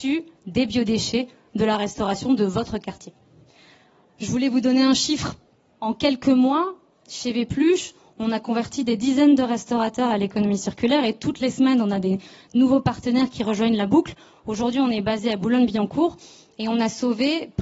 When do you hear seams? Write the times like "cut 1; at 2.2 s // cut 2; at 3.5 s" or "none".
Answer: none

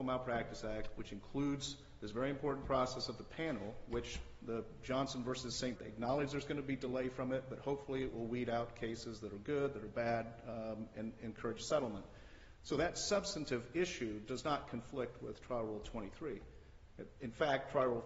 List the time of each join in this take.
cut 1; at 5.8 s

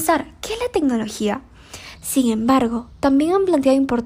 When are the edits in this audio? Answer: cut 1; at 2.0 s

